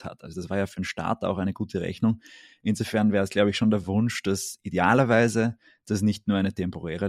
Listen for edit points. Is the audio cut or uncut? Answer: uncut